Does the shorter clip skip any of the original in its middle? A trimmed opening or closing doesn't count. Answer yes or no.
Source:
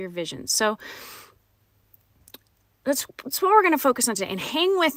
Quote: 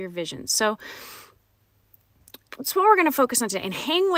yes